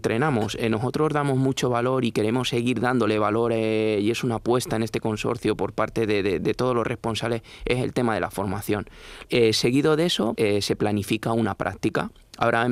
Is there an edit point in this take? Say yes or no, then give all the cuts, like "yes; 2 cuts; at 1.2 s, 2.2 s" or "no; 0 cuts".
yes; 2 cuts; at 9.2 s, 10.4 s